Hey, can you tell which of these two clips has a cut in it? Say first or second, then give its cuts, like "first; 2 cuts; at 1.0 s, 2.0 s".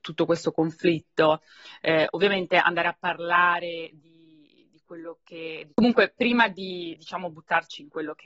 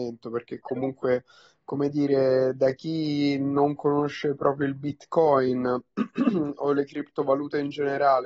first; 2 cuts; at 5.7 s, 7.0 s